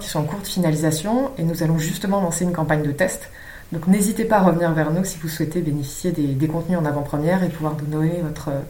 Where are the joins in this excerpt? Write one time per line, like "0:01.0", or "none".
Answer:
none